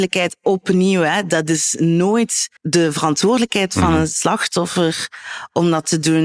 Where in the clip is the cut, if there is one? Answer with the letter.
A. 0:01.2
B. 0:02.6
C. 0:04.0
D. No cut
B